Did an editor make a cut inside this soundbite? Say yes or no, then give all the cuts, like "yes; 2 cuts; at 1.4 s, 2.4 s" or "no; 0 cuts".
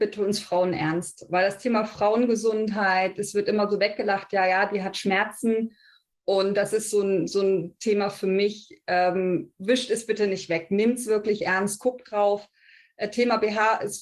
no; 0 cuts